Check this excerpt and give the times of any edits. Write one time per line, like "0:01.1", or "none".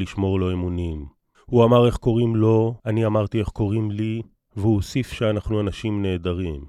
0:01.3
0:02.8
0:04.4